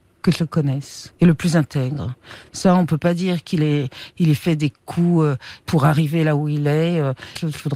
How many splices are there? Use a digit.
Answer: 0